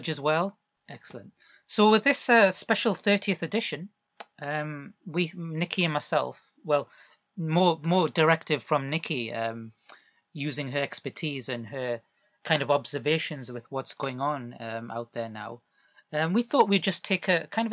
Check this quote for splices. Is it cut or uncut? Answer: cut